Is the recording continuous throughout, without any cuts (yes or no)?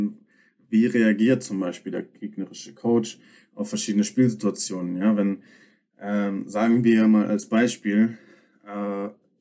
yes